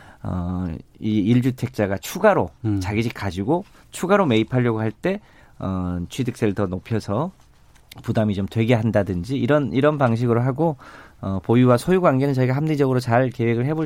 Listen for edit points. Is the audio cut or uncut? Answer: uncut